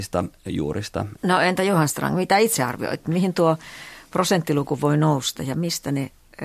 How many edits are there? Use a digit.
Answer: 1